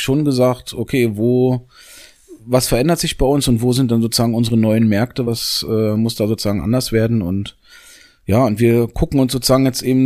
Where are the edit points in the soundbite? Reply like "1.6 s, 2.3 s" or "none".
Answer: none